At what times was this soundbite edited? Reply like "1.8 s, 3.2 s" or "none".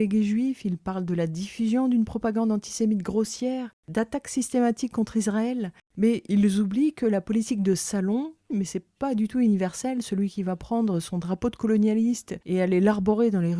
8.5 s